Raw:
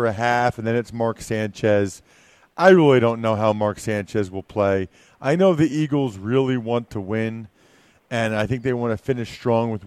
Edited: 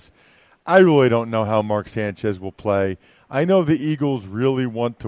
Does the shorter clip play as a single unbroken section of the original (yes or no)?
yes